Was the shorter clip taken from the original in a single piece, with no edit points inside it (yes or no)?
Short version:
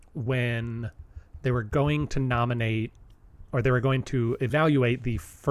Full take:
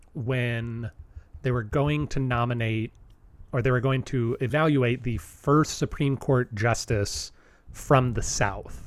yes